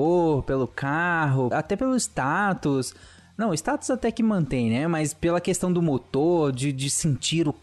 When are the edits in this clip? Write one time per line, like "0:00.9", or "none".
0:01.5